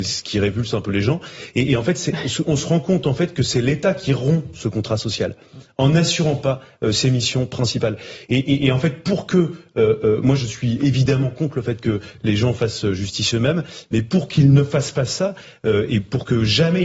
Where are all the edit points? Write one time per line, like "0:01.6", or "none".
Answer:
0:02.4